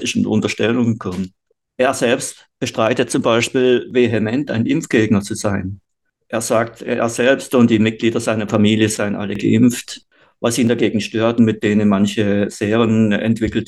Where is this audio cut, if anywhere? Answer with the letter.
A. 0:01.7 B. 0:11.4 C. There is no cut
B